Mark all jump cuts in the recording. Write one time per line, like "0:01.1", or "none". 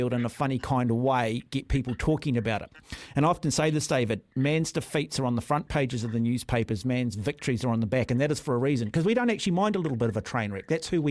none